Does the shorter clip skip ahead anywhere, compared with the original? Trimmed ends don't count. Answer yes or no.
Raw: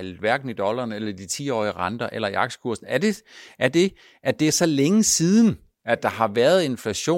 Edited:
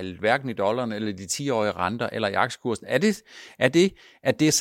no